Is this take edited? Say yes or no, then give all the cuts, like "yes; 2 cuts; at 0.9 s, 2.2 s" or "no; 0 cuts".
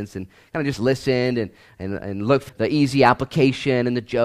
yes; 1 cut; at 2.5 s